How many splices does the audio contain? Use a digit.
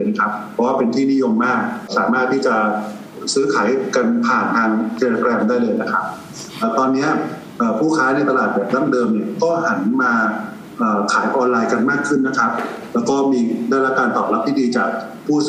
1